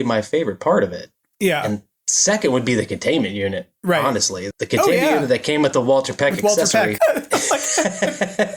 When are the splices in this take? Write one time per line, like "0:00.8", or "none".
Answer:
0:04.5
0:07.0